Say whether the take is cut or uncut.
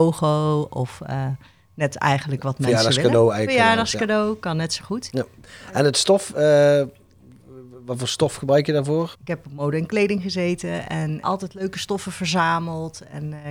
cut